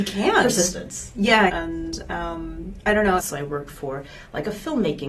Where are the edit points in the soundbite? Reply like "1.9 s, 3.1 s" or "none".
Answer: 1.5 s, 3.2 s